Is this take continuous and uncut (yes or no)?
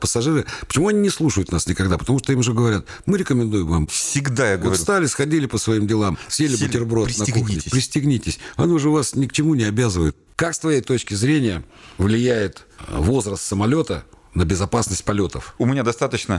yes